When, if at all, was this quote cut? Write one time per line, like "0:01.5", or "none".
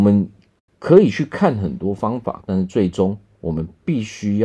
0:02.4